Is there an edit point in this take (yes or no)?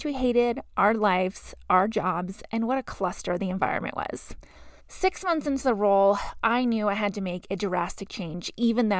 yes